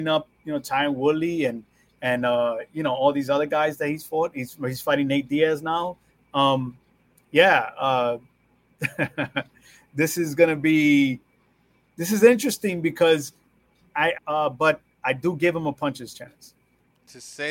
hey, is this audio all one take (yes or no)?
no